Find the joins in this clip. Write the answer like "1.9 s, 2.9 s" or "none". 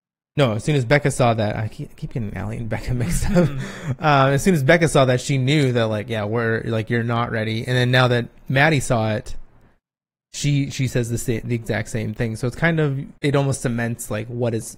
13.2 s

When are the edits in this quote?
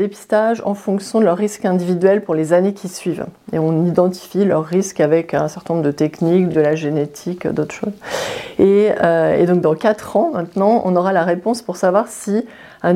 none

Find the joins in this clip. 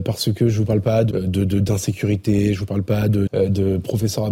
1.1 s, 3.3 s

